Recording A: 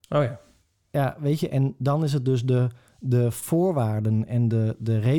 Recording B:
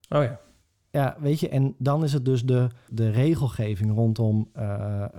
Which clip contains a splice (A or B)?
B